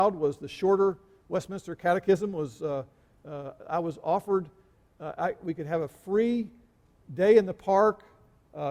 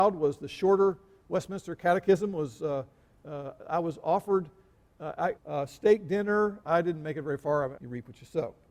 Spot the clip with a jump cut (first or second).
second